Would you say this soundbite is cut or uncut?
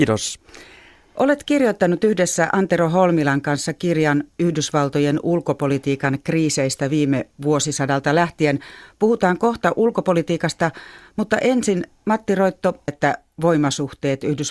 cut